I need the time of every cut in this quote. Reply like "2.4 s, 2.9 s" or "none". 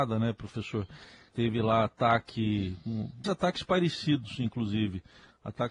1.3 s, 3.2 s